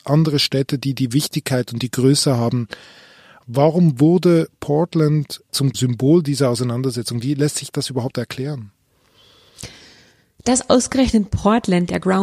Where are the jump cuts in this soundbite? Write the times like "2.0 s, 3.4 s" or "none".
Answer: none